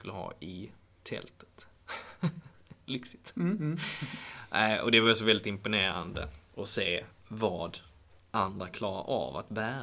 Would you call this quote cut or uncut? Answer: uncut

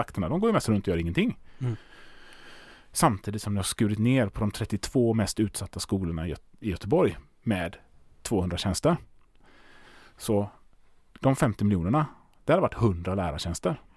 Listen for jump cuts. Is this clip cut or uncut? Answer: uncut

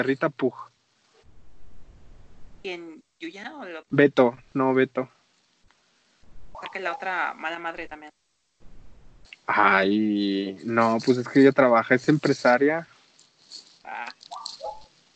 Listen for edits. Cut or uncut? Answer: uncut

